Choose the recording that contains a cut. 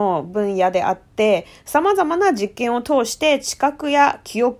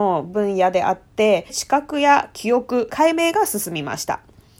second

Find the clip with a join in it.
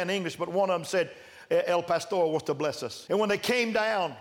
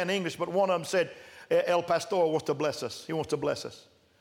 first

